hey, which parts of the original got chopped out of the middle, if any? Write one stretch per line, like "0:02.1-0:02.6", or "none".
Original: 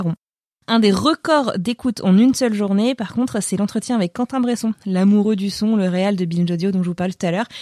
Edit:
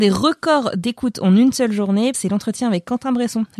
0:03.0-0:03.4